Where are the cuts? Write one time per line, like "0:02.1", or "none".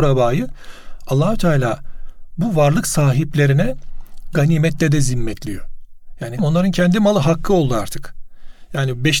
0:06.4